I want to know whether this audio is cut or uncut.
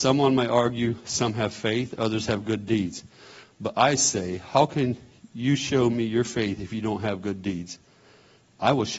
uncut